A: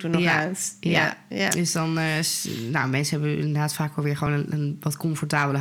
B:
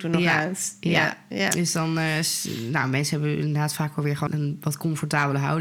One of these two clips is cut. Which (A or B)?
B